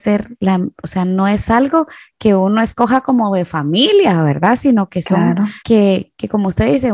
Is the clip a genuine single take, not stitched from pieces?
no; 1 cut; at 5.6 s

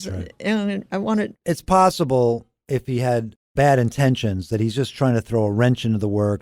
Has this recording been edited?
no; 0 cuts

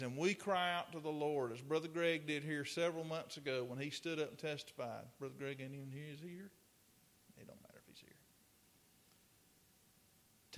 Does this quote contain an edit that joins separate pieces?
no; 0 cuts

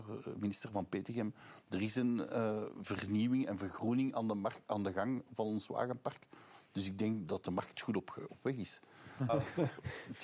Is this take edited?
yes; 2 cuts; at 8.3 s, 9.3 s

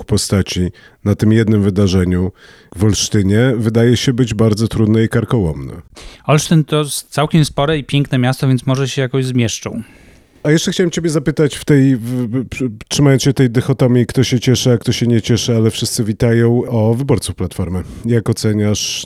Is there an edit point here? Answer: no; 0 cuts

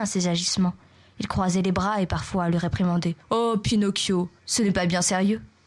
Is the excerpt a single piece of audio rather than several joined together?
no; 1 cut; at 3.2 s

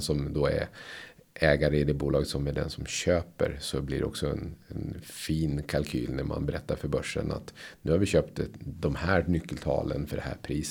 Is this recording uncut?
yes; 0 cuts

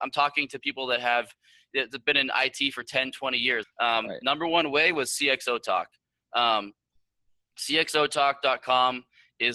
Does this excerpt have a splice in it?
yes; 1 cut; at 3.6 s

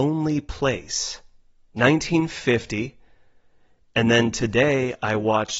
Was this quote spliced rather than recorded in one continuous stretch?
no; 0 cuts

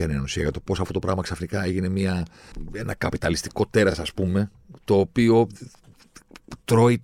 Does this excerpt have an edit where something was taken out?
no; 0 cuts

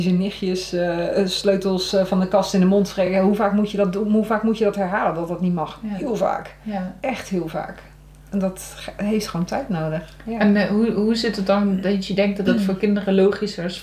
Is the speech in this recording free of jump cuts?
yes; 0 cuts

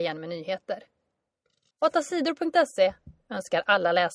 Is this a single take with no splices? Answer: no; 1 cut; at 1.7 s

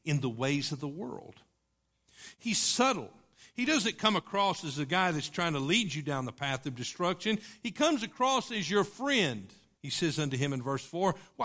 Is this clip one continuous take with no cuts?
no; 1 cut; at 9.8 s

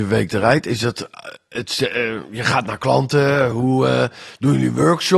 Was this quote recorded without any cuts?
yes; 0 cuts

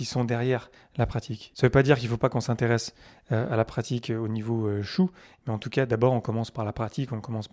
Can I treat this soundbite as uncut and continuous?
no; 1 cut; at 1.5 s

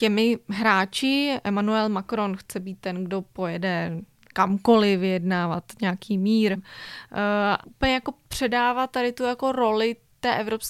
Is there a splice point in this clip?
yes; 2 cuts; at 6.6 s, 7.6 s

